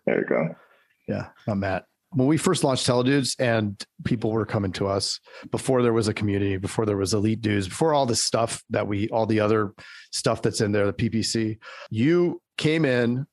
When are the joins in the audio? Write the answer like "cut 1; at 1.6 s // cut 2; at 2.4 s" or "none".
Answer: cut 1; at 1.4 s